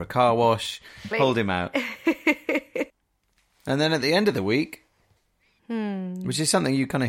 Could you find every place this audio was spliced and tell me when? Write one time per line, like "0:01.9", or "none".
0:01.1
0:05.6